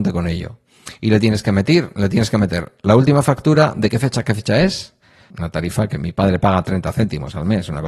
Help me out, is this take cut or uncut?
cut